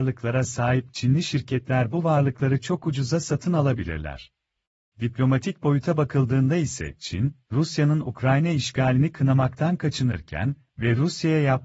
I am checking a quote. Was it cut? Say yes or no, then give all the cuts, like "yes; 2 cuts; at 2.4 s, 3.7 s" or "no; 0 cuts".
yes; 1 cut; at 4.9 s